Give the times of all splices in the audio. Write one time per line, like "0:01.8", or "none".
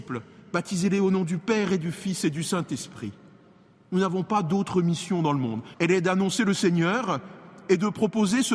0:05.7